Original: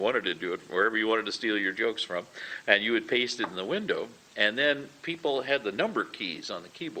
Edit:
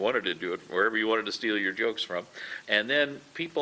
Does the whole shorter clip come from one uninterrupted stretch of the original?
no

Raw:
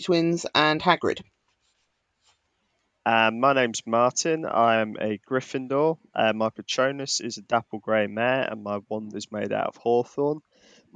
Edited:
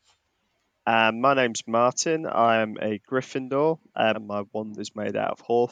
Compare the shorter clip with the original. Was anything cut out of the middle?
yes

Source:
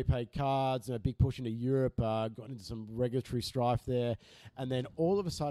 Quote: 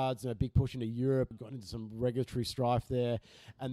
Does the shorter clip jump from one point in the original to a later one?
yes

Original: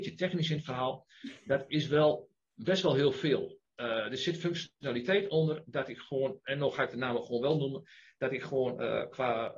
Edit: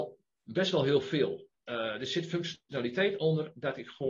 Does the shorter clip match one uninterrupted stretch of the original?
yes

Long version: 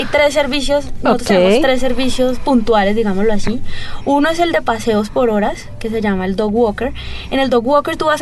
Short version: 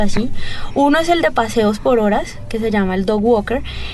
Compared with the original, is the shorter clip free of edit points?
yes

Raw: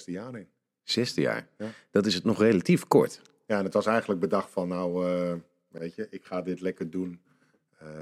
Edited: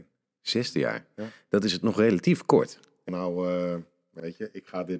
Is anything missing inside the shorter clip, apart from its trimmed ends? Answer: yes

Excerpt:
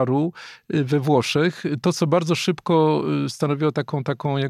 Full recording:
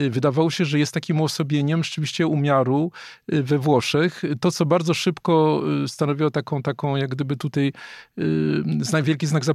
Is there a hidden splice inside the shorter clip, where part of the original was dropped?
no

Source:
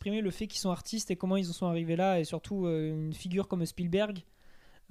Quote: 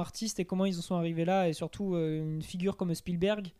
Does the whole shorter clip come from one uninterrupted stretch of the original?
yes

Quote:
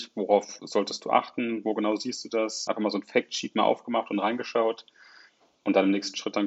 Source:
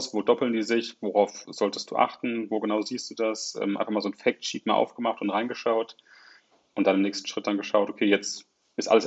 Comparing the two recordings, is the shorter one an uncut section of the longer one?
no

